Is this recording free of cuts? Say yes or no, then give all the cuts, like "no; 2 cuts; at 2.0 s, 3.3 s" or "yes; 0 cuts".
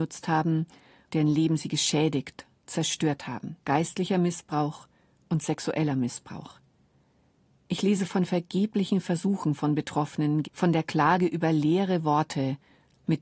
no; 3 cuts; at 1.1 s, 3.6 s, 10.4 s